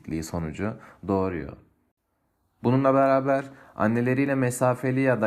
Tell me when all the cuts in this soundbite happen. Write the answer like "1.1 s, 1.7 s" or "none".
2.6 s

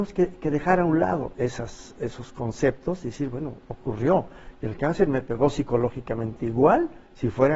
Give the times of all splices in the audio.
none

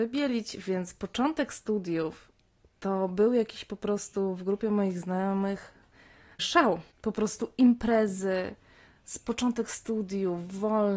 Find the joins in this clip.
none

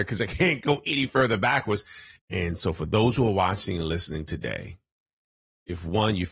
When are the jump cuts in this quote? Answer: 2.2 s

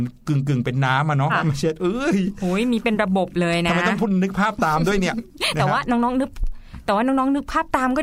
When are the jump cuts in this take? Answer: 1.3 s

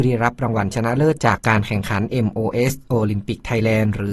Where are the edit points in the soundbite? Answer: 1.4 s

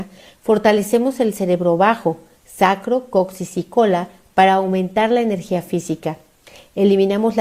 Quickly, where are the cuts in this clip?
none

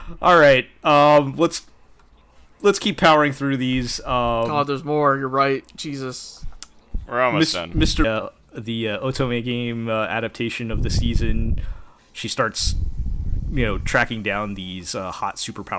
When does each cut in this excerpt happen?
8.0 s, 12.0 s

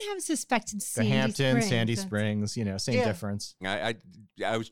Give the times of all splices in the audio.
3.6 s

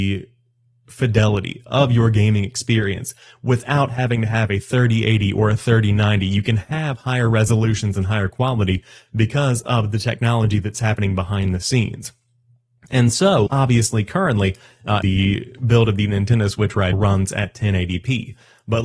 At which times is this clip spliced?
13.5 s, 15.0 s, 16.9 s

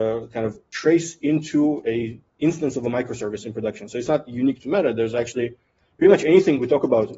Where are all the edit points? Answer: 2.3 s

